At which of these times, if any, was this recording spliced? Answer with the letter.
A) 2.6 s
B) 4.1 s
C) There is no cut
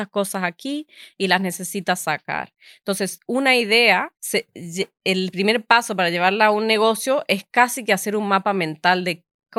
B